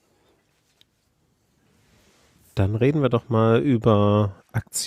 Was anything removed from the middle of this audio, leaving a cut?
no; 0 cuts

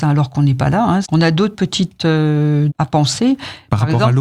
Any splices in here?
yes; 2 cuts; at 1.0 s, 2.7 s

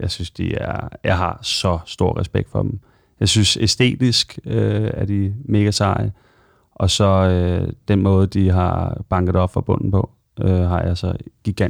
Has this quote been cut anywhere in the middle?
no; 0 cuts

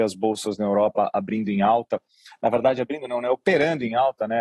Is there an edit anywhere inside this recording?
no; 0 cuts

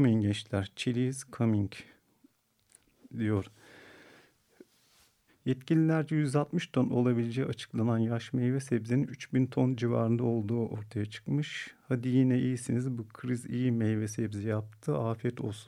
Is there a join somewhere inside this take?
yes; 1 cut; at 5.3 s

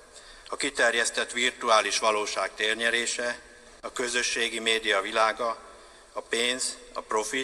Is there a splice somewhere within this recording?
no; 0 cuts

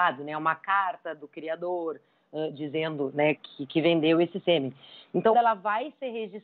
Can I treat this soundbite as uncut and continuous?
no; 2 cuts; at 3.4 s, 5.3 s

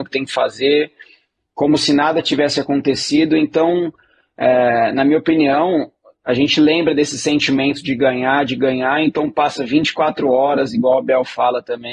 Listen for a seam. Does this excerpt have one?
no; 0 cuts

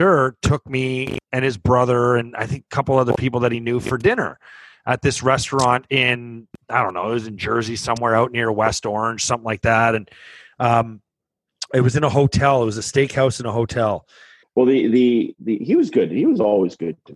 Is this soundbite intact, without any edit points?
no; 1 cut; at 14.4 s

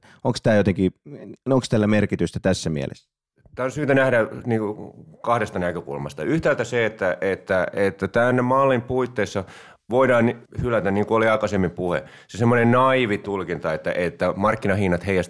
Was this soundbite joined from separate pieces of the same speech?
no; 0 cuts

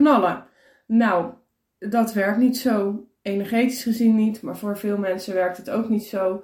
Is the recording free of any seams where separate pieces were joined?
yes; 0 cuts

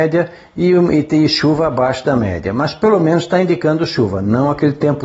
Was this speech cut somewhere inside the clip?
no; 0 cuts

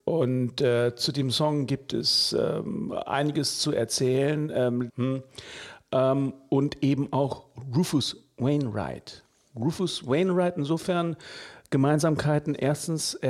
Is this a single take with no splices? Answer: no; 1 cut; at 4.9 s

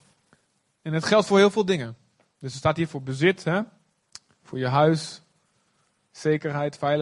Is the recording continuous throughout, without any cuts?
yes; 0 cuts

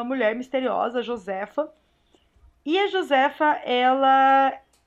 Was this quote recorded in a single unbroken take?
yes; 0 cuts

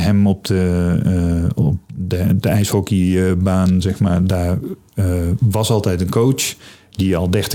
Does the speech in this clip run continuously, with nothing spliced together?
yes; 0 cuts

